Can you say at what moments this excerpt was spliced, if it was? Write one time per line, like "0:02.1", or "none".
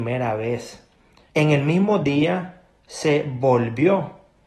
0:01.3